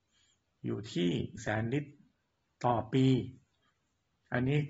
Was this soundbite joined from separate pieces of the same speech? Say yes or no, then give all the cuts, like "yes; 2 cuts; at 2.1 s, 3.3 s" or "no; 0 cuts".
yes; 1 cut; at 1.4 s